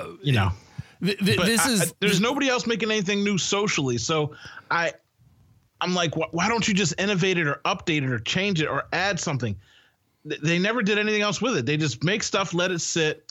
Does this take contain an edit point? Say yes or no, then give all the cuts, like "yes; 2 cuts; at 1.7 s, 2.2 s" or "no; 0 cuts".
no; 0 cuts